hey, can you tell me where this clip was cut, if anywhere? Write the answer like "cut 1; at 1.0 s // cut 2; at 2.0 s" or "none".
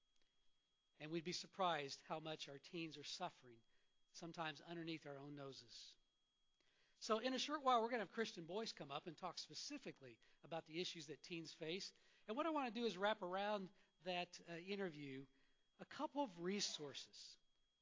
none